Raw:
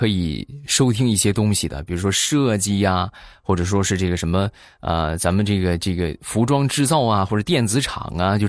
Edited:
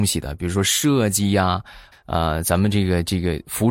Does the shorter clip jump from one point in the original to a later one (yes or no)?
yes